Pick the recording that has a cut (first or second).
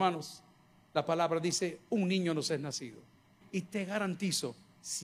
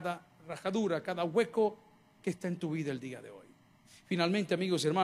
first